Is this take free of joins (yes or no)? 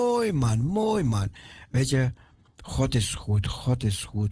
yes